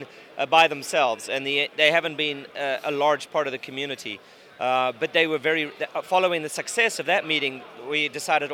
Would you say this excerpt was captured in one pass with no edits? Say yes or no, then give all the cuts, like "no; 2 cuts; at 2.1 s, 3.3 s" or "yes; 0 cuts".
yes; 0 cuts